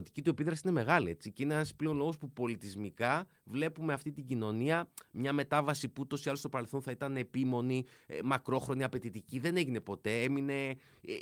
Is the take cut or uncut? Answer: uncut